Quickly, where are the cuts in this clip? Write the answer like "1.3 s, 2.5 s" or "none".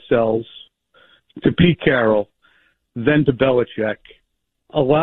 none